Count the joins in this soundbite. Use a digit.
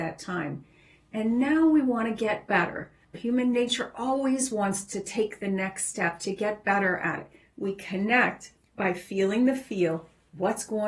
2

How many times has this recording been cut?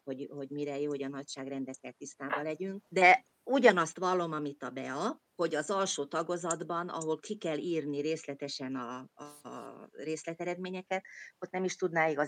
0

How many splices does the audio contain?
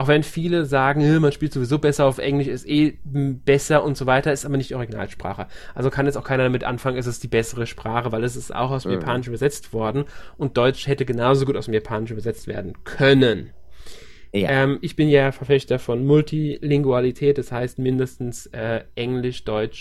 0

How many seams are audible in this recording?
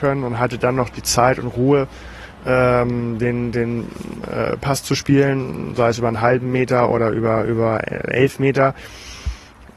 0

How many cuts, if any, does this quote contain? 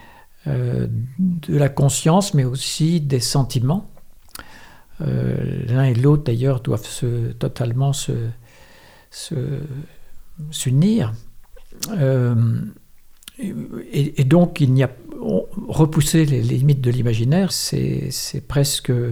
1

